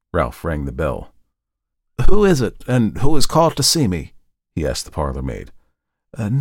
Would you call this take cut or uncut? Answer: uncut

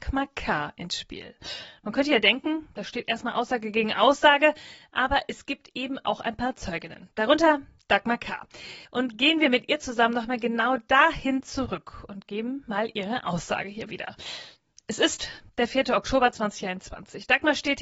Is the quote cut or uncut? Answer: cut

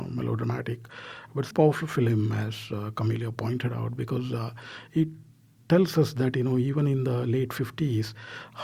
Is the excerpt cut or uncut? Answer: cut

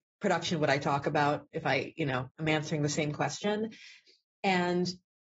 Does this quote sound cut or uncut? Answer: uncut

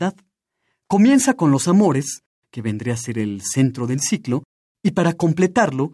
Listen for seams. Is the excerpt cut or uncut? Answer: cut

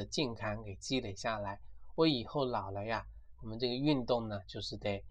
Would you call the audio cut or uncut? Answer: cut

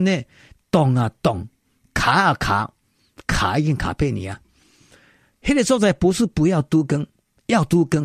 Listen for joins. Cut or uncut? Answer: uncut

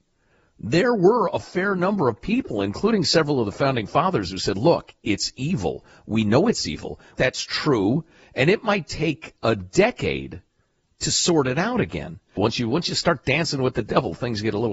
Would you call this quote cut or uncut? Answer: cut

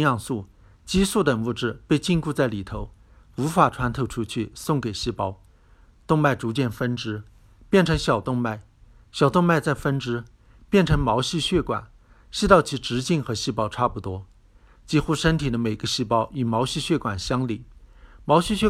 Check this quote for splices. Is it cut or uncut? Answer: uncut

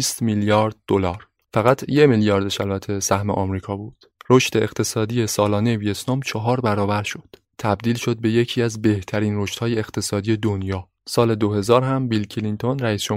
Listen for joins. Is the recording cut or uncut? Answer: cut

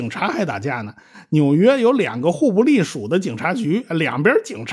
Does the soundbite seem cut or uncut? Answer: uncut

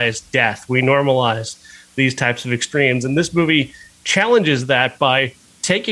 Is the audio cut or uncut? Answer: uncut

